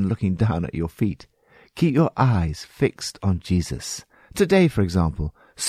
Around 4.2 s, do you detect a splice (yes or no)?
yes